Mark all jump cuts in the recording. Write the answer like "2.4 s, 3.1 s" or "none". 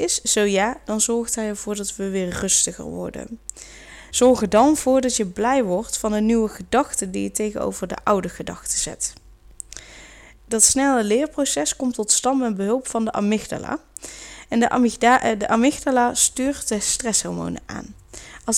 4.1 s, 10.4 s, 14.5 s